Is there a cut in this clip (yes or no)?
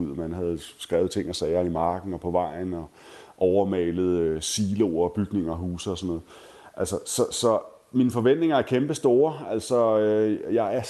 no